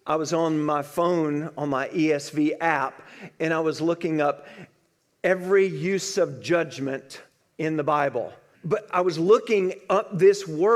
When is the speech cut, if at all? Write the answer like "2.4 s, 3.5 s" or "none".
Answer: 8.5 s